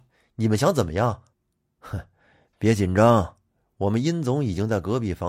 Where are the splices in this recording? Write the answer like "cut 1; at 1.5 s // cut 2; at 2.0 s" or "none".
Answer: cut 1; at 1.3 s